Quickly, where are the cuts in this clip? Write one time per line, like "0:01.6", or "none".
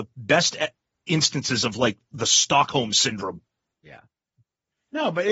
0:03.7